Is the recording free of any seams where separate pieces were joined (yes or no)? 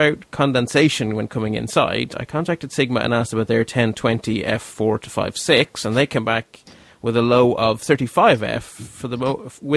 yes